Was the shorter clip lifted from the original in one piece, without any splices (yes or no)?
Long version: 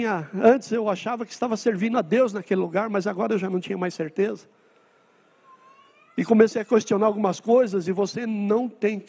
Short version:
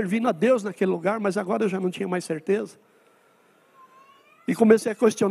yes